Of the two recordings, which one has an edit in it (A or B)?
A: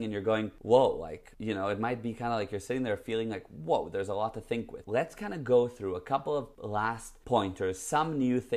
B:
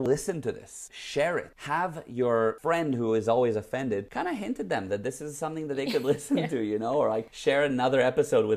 A